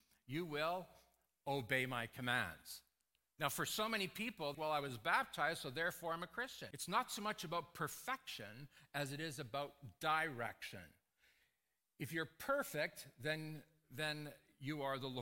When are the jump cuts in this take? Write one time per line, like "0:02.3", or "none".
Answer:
0:04.5
0:06.7